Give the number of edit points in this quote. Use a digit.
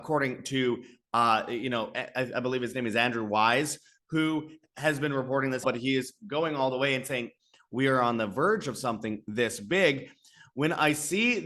1